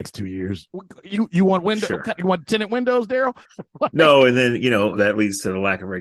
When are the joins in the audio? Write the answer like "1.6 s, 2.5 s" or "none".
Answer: 3.4 s, 5.0 s